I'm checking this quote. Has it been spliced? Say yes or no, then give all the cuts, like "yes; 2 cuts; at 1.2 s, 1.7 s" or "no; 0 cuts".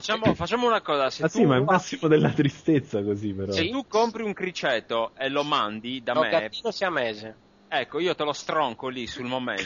no; 0 cuts